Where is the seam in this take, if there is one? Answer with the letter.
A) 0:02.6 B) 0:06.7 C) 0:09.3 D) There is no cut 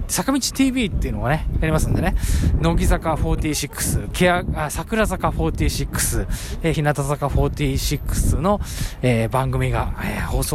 D